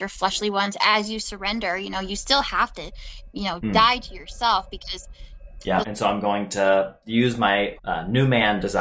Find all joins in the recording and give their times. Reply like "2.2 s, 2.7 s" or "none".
5.8 s, 7.8 s